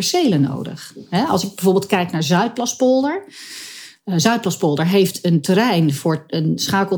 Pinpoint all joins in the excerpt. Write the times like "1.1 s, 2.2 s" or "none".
none